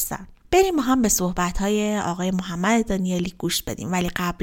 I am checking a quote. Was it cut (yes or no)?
no